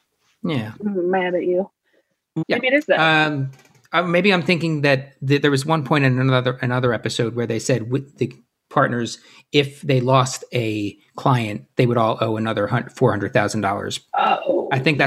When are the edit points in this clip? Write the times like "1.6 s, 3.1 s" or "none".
2.4 s